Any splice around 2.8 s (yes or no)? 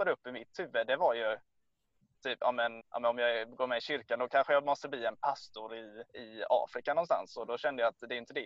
yes